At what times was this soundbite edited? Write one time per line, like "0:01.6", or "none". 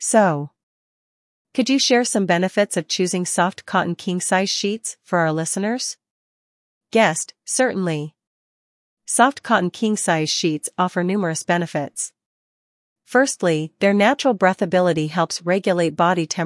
none